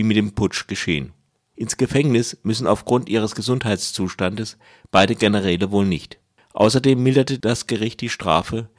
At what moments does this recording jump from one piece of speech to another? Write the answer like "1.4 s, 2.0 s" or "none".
none